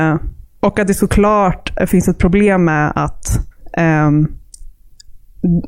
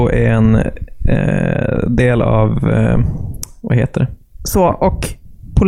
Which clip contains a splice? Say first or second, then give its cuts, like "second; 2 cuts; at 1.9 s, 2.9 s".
second; 1 cut; at 4.4 s